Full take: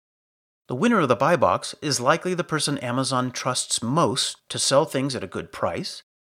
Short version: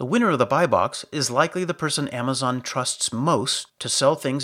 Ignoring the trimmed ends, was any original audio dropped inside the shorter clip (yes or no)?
no